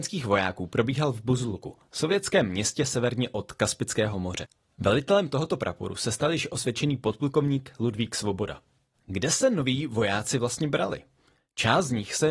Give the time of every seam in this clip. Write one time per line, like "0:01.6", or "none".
0:08.9